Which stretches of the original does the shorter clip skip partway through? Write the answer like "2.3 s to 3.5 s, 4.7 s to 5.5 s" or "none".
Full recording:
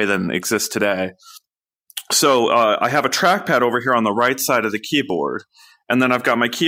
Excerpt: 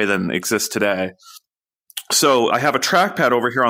2.5 s to 2.8 s